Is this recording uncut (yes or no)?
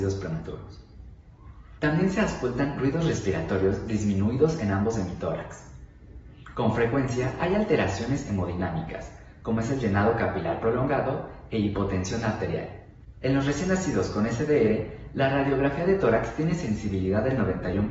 no